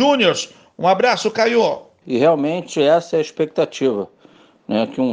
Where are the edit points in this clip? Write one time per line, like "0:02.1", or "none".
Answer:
0:02.0